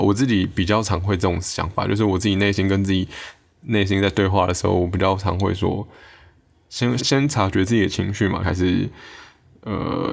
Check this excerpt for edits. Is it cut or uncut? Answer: cut